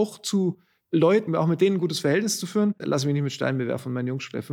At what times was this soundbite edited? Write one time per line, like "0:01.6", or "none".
0:01.3
0:02.8

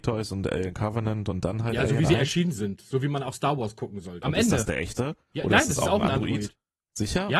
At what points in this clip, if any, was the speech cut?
0:04.2

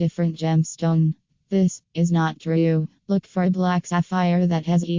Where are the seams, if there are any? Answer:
0:01.8
0:03.0

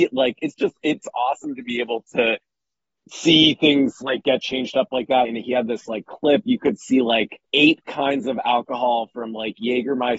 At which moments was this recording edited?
0:05.2
0:07.4

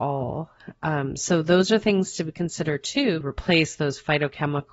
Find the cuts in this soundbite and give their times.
0:03.2

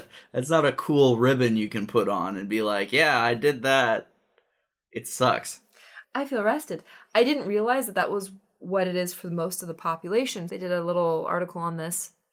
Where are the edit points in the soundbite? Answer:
0:06.0
0:10.5

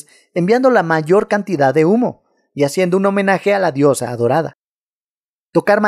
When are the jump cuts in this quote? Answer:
none

